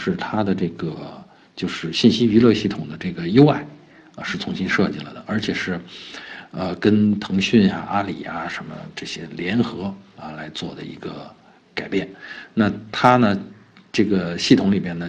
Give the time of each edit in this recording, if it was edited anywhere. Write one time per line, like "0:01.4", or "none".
none